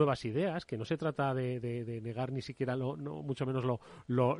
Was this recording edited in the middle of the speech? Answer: no; 0 cuts

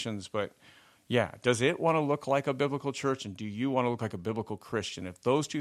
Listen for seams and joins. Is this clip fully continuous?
yes; 0 cuts

